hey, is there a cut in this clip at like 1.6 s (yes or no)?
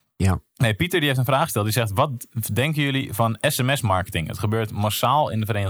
no